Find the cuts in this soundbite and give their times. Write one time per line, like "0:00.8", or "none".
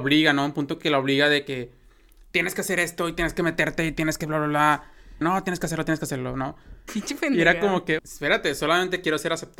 0:05.2
0:06.9
0:08.0